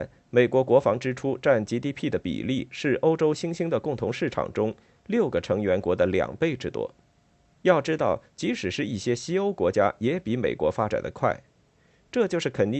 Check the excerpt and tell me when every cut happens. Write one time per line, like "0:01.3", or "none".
0:07.5